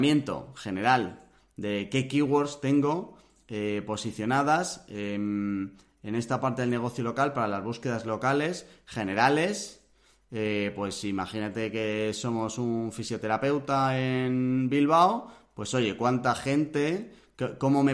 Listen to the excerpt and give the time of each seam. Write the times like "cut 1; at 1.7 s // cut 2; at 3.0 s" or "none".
none